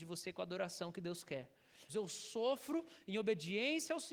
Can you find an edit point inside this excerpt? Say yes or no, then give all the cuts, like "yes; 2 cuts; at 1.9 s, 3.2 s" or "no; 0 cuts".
yes; 1 cut; at 1.9 s